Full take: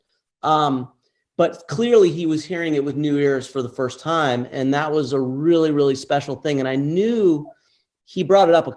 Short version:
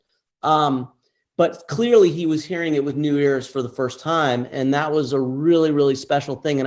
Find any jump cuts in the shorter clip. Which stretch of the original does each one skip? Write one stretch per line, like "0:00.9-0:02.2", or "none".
none

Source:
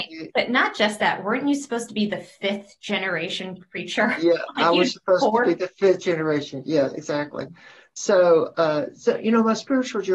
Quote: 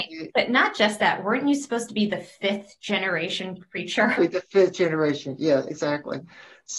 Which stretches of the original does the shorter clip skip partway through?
0:04.2-0:05.4

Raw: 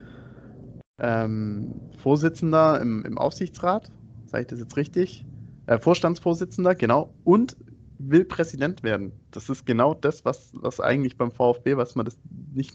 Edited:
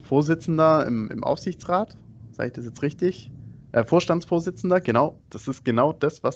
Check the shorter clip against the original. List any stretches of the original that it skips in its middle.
0:07.1-0:09.2

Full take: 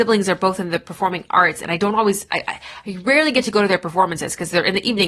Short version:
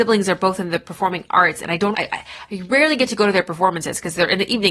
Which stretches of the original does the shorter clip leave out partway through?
0:01.9-0:02.3

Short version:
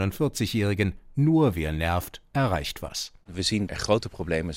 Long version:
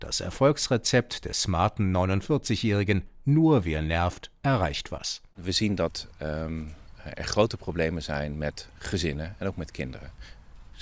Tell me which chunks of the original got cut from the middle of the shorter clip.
0:05.8-0:07.1

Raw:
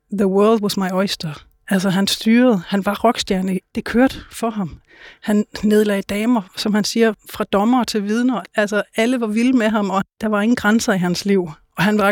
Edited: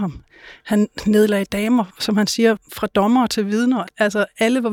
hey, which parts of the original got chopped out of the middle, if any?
none

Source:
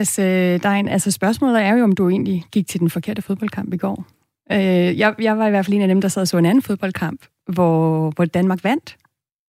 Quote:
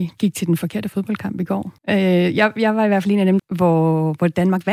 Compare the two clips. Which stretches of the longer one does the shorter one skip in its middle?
0:04.1-0:04.4
0:06.0-0:07.4

